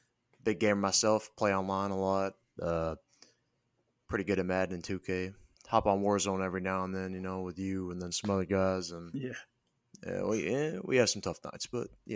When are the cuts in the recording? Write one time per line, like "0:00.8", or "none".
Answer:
0:05.6